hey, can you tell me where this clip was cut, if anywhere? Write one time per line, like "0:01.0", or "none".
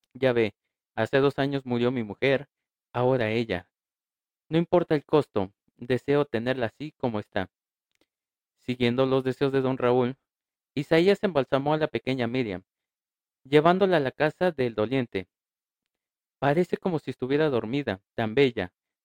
0:18.1